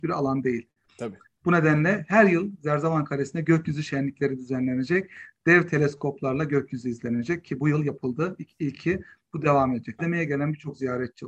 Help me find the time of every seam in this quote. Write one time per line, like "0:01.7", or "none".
0:01.4
0:10.0